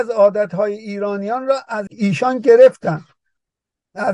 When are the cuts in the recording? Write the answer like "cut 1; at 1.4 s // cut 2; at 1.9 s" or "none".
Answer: cut 1; at 1.9 s